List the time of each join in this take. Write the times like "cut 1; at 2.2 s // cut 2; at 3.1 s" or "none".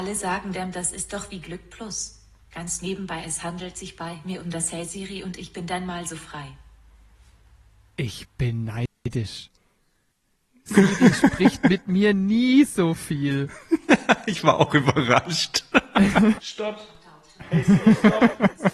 cut 1; at 16.3 s